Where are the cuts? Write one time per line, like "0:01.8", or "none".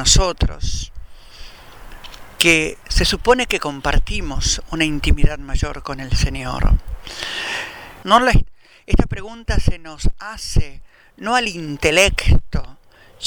0:08.0